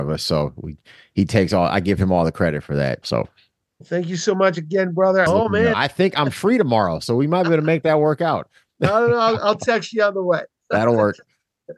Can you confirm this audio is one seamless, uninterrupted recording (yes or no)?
no